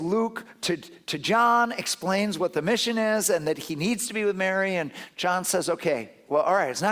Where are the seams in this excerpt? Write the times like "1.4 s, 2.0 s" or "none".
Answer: none

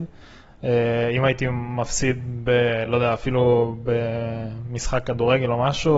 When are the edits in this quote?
none

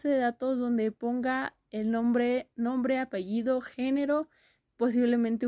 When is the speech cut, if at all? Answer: none

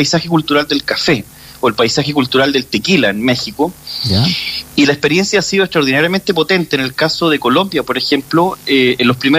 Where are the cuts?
none

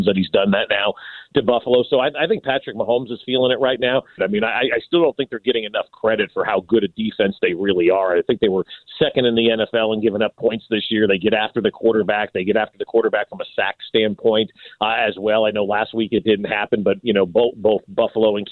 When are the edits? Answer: 4.2 s

